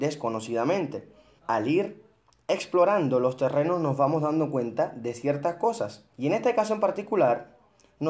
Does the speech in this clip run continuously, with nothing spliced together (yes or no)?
no